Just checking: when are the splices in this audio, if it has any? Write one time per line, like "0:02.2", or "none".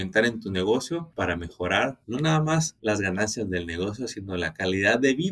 none